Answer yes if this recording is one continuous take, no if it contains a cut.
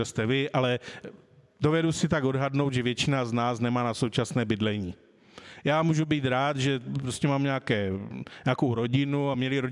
yes